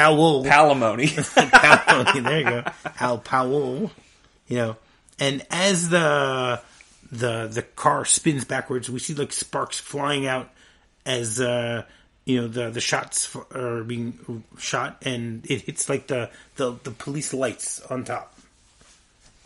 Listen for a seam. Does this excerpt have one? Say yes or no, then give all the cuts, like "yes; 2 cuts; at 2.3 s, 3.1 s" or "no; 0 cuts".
no; 0 cuts